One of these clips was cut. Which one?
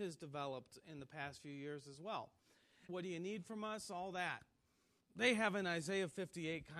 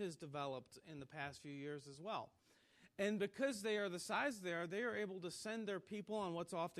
first; 2 cuts; at 2.9 s, 5.0 s

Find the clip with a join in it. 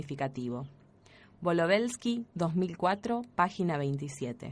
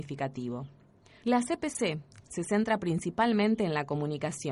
second; 1 cut; at 1.2 s

